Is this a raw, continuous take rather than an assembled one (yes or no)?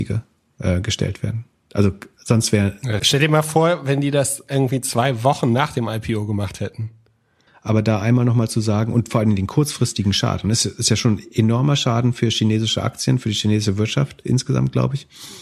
no